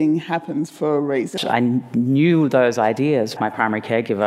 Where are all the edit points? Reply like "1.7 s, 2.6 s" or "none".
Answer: 1.4 s, 3.4 s